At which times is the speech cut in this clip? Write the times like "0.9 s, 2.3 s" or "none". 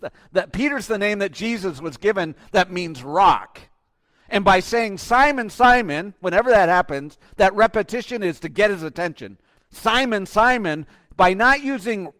9.6 s